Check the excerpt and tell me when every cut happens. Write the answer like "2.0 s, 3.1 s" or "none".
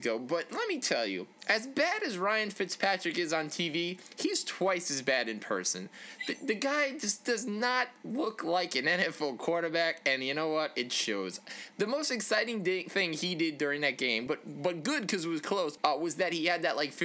14.3 s, 15.8 s